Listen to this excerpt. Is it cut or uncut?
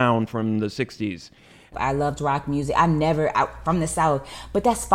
cut